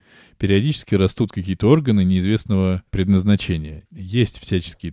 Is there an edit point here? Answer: yes; 1 cut; at 3.8 s

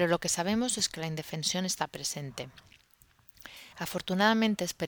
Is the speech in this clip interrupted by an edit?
no; 0 cuts

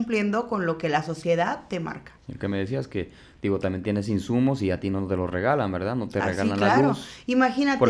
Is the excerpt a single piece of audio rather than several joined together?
yes; 0 cuts

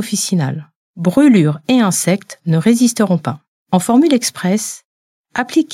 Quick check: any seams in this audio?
yes; 1 cut; at 3.6 s

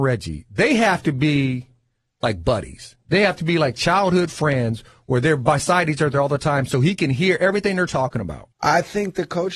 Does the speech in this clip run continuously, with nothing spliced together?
no; 1 cut; at 8.5 s

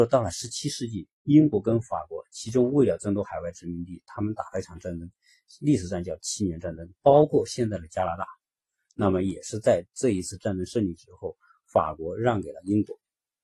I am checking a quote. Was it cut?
yes; 1 cut; at 7.0 s

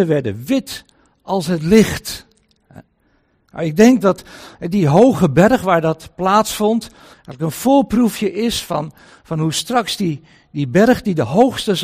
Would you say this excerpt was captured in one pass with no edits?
no; 1 cut; at 7.1 s

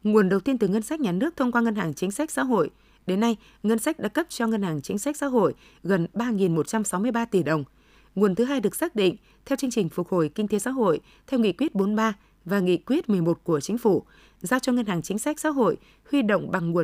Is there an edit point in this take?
no; 0 cuts

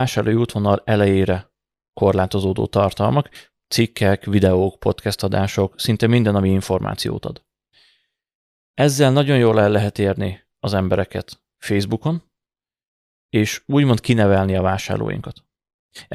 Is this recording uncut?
yes; 0 cuts

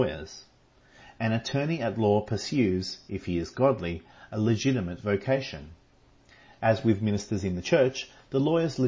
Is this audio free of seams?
yes; 0 cuts

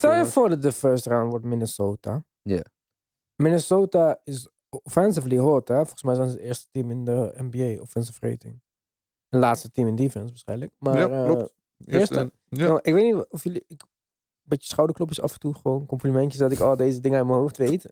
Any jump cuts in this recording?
no; 0 cuts

